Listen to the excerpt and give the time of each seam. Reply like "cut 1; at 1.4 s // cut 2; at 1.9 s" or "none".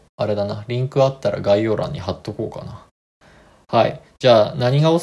none